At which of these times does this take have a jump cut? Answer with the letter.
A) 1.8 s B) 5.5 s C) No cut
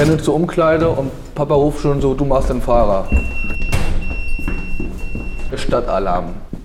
B